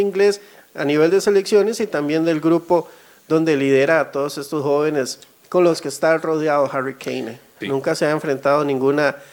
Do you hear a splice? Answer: yes; 1 cut; at 7.6 s

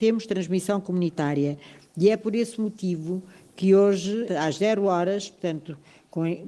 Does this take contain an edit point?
yes; 1 cut; at 4.2 s

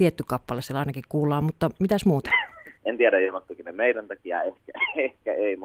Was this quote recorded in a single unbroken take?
no; 1 cut; at 2.8 s

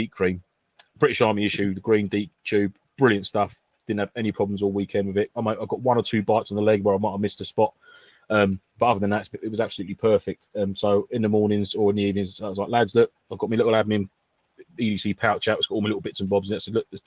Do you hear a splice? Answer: no; 0 cuts

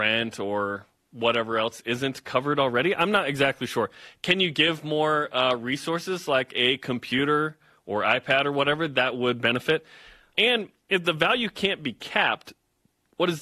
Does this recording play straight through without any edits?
no; 1 cut; at 10.3 s

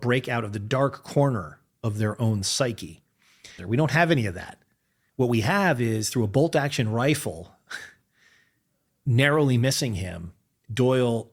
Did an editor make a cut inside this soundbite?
yes; 1 cut; at 3.6 s

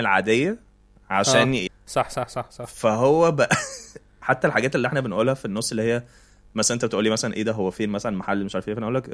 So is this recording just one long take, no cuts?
no; 1 cut; at 1.7 s

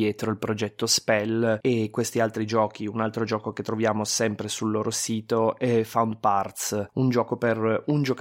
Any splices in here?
no; 0 cuts

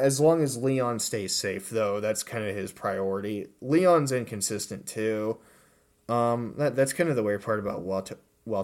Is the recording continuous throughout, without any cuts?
yes; 0 cuts

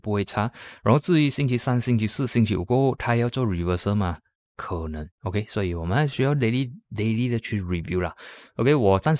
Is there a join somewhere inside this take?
no; 0 cuts

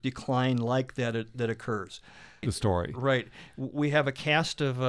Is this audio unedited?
no; 1 cut; at 2.4 s

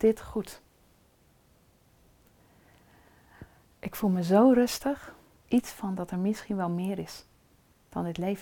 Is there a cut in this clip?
yes; 1 cut; at 5.4 s

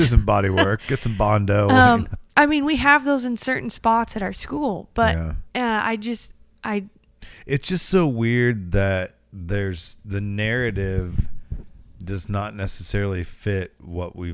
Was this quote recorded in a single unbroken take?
yes; 0 cuts

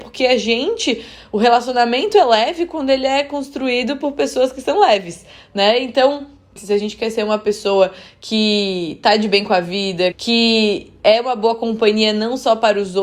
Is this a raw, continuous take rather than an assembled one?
no; 2 cuts; at 6.6 s, 10.1 s

